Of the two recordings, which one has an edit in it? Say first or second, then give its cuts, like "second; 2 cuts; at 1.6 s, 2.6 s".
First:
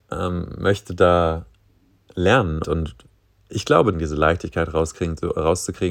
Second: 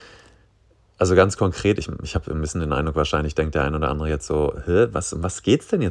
first; 2 cuts; at 2.6 s, 3.9 s